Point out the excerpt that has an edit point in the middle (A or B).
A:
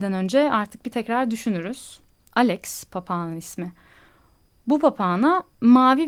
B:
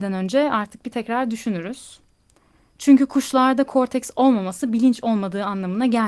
A